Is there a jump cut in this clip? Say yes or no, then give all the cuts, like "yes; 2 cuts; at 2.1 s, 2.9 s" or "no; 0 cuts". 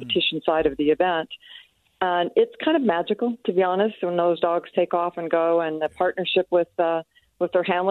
no; 0 cuts